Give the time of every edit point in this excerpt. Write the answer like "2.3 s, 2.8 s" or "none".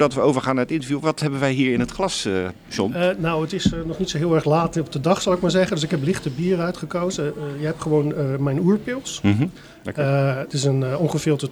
none